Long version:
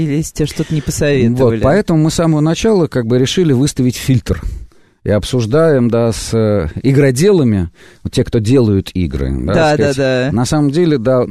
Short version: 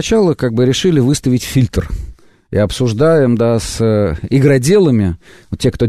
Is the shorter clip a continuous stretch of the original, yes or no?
yes